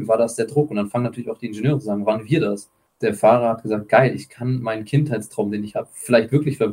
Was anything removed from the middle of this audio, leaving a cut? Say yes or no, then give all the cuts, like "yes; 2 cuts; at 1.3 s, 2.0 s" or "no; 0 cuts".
yes; 1 cut; at 2.9 s